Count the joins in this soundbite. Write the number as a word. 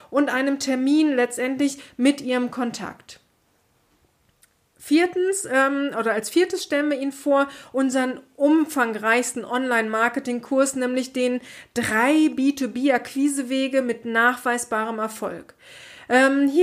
zero